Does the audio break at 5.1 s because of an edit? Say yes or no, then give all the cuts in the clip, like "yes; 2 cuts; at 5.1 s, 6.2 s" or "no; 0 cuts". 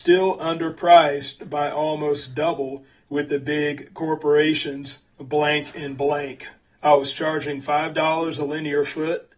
yes; 2 cuts; at 5.1 s, 6.6 s